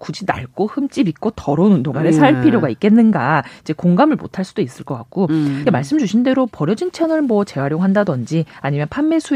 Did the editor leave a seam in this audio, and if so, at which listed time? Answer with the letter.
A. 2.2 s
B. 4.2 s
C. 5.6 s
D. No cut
C